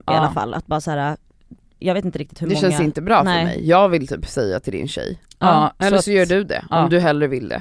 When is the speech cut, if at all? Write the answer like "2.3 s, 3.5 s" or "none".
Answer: 1.8 s

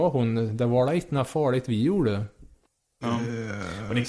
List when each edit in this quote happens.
3.0 s

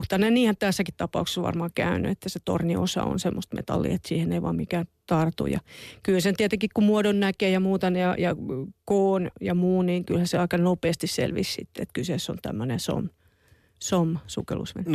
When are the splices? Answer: none

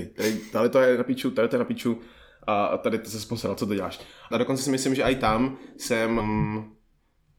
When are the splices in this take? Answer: 4.3 s, 6.2 s

